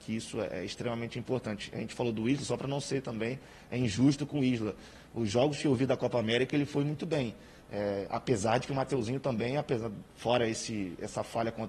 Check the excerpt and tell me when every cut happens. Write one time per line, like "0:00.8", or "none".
0:10.1